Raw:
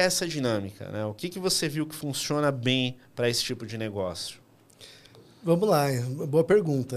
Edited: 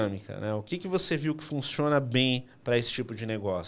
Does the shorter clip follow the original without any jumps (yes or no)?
yes